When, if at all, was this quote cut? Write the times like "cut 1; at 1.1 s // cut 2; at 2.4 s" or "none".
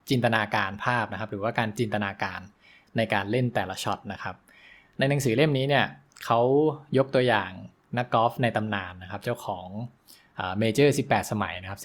none

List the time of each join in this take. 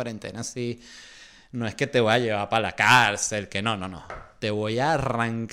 none

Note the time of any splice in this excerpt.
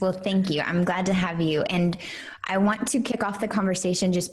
none

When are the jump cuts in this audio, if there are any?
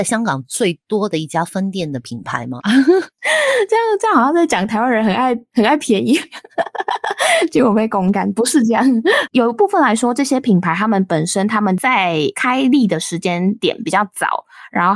cut 1; at 2.6 s // cut 2; at 9.3 s

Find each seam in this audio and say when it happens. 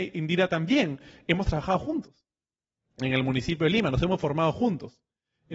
none

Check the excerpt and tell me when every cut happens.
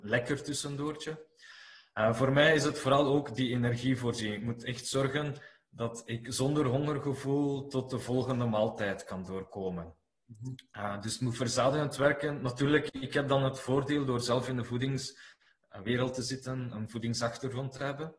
cut 1; at 16.7 s

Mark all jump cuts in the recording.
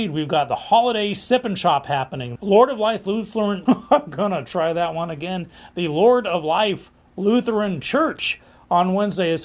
cut 1; at 2.4 s // cut 2; at 3.7 s

